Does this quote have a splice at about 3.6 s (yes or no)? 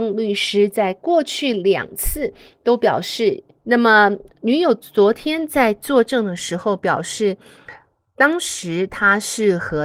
yes